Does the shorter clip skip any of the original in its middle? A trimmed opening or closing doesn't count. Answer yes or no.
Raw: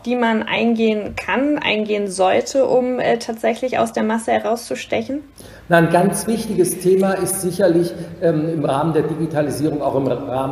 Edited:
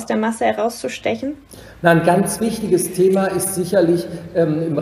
no